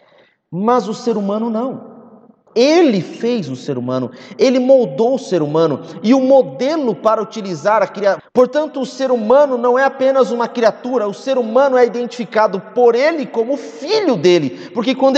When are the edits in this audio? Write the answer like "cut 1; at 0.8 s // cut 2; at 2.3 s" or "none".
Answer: cut 1; at 2.5 s // cut 2; at 8.2 s